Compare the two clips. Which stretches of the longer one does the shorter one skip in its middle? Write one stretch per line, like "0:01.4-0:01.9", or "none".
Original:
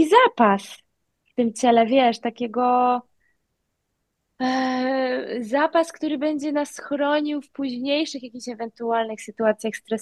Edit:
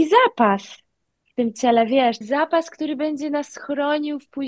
0:02.2-0:05.4

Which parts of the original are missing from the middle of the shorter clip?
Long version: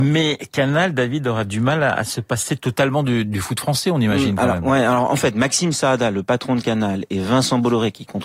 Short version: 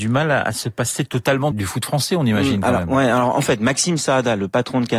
0:03.0-0:03.3

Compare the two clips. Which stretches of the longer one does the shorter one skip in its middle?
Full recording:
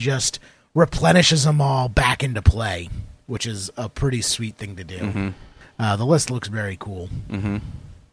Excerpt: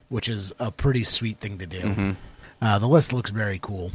none

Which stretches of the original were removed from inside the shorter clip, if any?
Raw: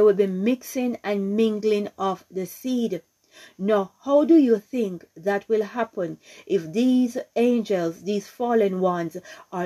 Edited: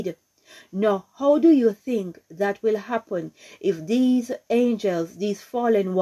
none

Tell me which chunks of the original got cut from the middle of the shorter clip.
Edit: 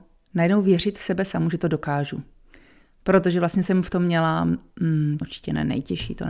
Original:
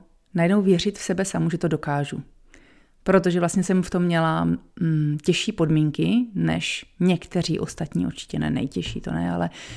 0:05.2-0:08.1

